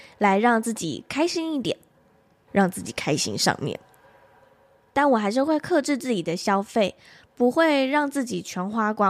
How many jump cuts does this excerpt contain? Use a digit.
1